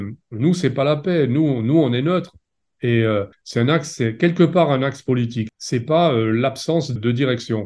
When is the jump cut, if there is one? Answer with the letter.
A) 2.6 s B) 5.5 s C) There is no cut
A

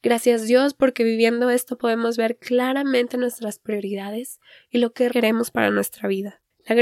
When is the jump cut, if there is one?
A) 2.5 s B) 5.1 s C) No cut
B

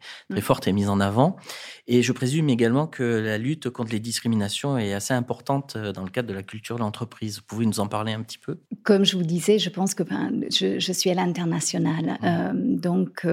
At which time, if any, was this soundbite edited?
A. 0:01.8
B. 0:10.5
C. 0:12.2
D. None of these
D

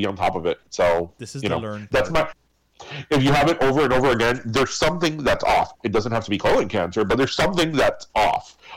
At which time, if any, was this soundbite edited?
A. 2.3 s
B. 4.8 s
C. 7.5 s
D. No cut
A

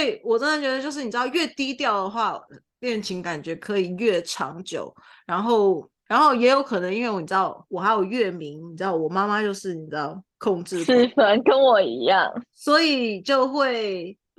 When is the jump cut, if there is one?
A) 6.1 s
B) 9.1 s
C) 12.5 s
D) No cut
A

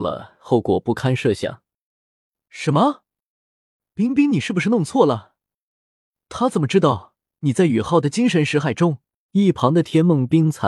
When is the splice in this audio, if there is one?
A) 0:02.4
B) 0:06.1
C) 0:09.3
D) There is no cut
C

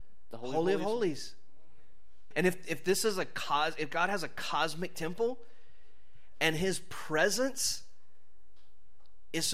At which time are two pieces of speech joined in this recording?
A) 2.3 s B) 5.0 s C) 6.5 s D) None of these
A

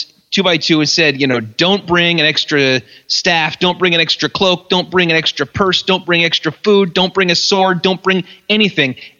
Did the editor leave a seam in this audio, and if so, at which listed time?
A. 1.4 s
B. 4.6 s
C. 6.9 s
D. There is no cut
D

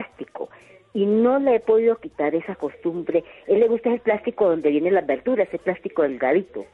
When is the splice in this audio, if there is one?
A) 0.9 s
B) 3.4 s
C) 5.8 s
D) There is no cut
D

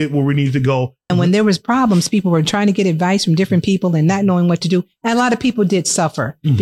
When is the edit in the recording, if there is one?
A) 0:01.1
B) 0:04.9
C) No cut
A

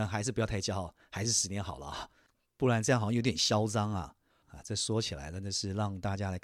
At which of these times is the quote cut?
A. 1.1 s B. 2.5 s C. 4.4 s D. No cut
C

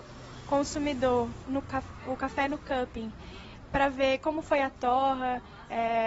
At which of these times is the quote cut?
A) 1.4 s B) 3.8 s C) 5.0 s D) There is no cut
A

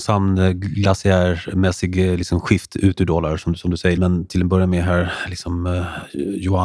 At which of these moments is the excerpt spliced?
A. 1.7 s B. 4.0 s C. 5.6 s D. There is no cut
B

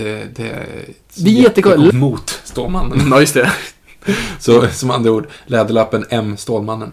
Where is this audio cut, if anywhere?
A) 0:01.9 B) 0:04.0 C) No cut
A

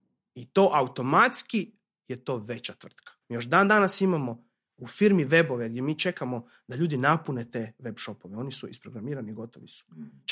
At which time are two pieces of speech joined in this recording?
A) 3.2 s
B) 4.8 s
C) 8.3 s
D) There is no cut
A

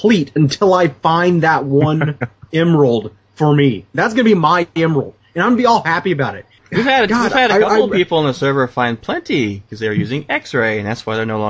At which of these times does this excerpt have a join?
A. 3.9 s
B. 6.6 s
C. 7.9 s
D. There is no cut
B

